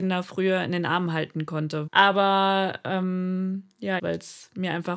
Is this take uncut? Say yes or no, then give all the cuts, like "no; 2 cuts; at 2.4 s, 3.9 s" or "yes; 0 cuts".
no; 2 cuts; at 1.9 s, 4.0 s